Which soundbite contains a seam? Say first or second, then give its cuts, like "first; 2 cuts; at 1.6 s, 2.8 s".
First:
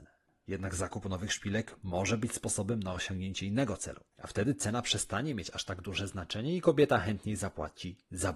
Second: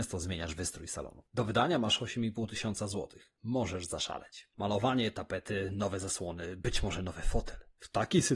first; 1 cut; at 4.1 s